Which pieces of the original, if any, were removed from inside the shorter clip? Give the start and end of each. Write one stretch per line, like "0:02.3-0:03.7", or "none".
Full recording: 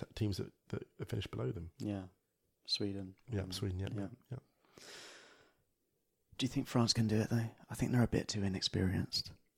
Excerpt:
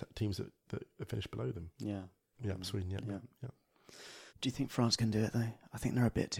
0:02.3-0:03.2
0:05.2-0:06.3